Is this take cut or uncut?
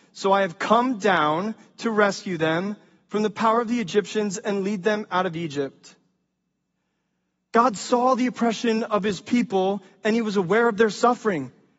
uncut